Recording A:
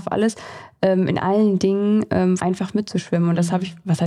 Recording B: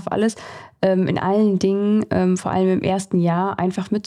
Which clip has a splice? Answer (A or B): A